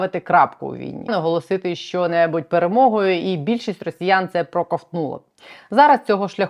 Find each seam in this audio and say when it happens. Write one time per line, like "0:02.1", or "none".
0:01.1